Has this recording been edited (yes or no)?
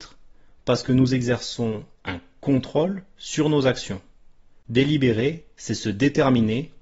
yes